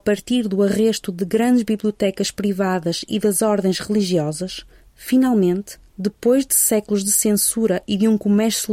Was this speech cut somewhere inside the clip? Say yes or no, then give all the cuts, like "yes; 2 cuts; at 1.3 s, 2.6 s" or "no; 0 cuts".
no; 0 cuts